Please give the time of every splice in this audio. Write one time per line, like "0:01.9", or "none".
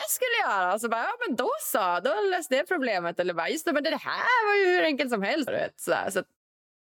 0:05.5